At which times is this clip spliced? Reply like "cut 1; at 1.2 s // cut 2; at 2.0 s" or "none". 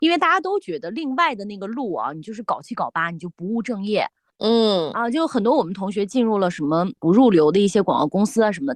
none